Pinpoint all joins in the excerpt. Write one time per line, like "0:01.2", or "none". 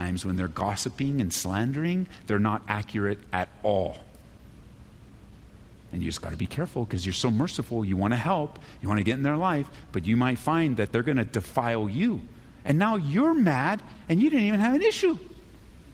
none

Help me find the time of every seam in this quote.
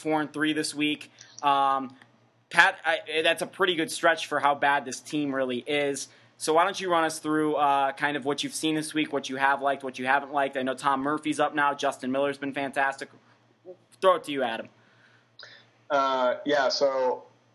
none

